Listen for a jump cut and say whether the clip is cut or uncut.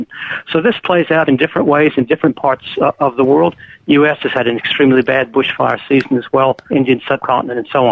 cut